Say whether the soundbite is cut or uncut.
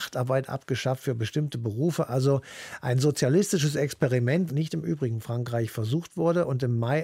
cut